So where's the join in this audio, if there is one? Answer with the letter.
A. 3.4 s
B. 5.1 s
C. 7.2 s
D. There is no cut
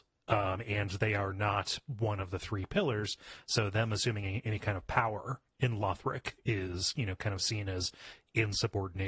D